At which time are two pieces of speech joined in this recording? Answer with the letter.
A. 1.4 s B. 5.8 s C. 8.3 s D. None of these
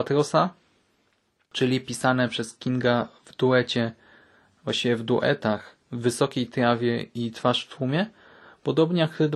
B